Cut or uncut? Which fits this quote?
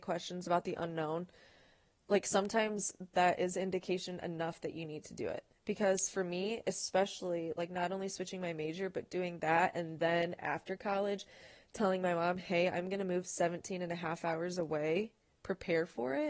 uncut